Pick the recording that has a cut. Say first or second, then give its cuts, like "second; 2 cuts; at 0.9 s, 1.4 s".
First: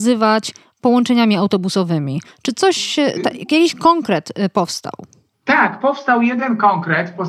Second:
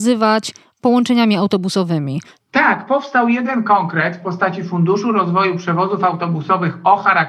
second; 1 cut; at 2.4 s